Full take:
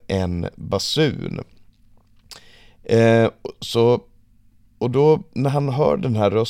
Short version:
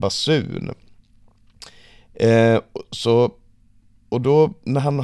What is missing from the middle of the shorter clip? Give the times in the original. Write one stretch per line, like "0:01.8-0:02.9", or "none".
none